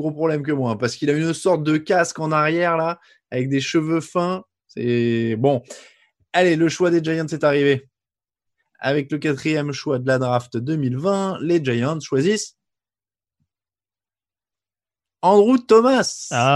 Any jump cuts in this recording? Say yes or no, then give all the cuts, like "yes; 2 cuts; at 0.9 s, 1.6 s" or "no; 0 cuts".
no; 0 cuts